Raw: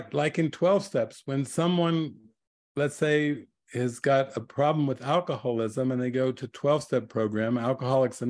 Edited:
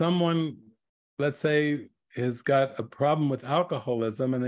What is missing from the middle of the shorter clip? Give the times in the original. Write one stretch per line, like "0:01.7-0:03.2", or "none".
none